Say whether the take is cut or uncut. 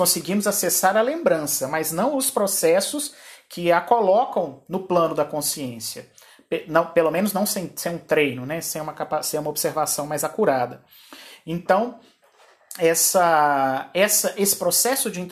uncut